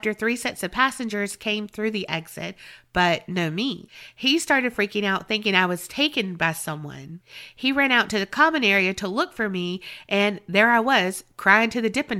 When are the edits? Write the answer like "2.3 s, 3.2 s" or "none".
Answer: none